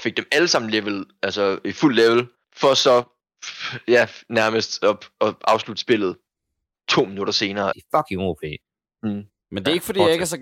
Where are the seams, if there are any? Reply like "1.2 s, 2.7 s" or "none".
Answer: 7.7 s